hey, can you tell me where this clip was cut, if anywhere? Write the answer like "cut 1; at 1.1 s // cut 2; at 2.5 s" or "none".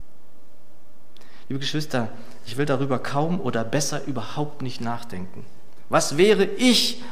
none